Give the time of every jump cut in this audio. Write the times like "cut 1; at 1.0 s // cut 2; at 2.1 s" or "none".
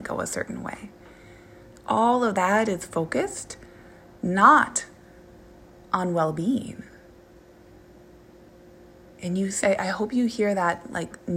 cut 1; at 9.6 s